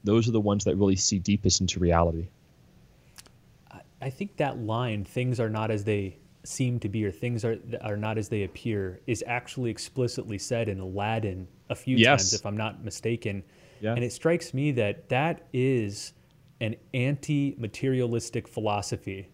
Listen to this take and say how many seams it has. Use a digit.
0